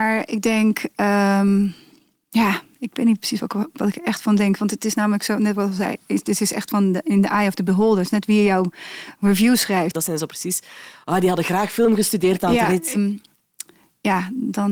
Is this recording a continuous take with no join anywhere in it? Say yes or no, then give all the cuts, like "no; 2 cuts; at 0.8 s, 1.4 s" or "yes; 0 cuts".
no; 2 cuts; at 9.9 s, 12.9 s